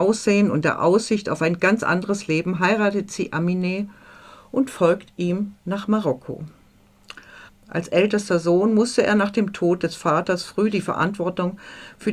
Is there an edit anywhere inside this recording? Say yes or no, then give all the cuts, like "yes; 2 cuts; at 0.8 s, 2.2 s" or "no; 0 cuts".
yes; 1 cut; at 7.5 s